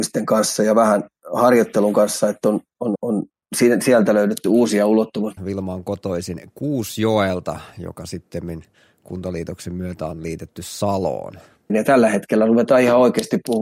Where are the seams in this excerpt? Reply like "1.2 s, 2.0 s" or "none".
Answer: 2.9 s, 5.4 s, 11.7 s